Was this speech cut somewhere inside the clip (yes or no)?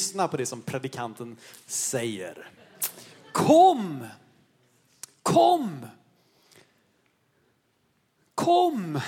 no